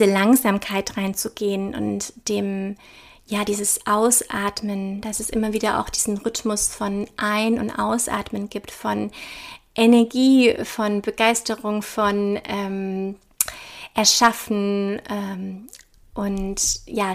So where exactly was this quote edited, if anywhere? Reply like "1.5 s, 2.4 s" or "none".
none